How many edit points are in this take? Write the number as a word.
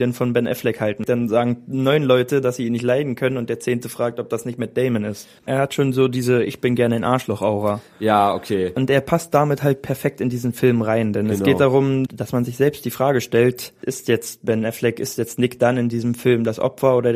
one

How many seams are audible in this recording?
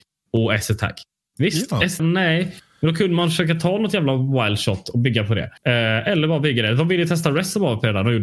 two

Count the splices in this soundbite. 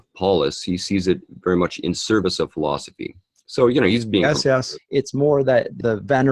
one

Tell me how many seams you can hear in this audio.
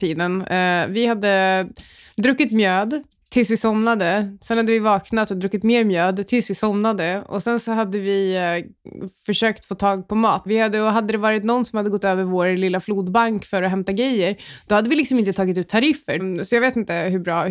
two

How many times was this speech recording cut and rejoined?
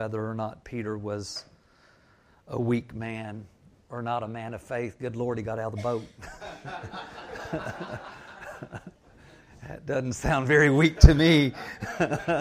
zero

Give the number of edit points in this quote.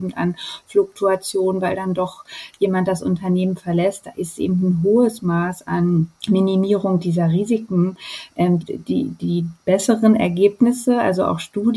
two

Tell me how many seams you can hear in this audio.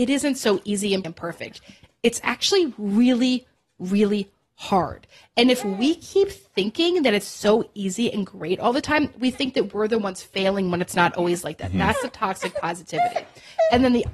one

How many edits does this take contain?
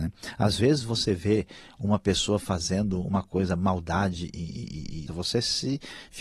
one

